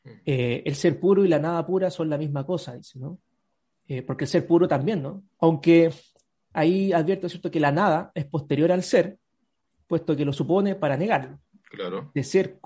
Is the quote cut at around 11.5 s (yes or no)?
yes